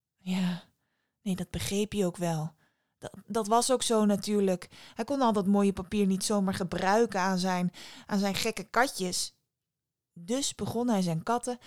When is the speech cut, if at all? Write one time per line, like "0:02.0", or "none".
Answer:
none